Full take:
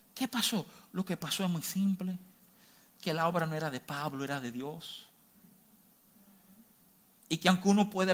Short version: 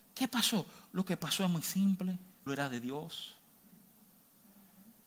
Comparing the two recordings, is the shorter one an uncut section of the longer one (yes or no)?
no